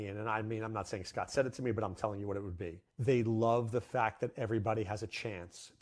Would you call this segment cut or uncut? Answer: cut